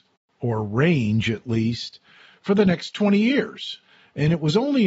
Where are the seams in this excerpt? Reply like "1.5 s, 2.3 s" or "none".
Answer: none